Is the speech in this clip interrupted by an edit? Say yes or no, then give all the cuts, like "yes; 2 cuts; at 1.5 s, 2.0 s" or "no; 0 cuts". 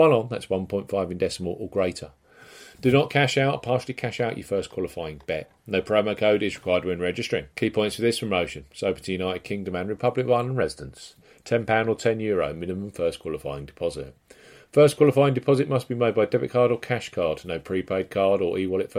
yes; 2 cuts; at 5.6 s, 7.5 s